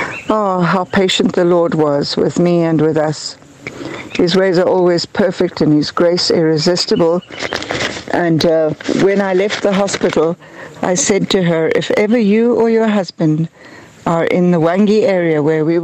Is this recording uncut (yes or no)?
yes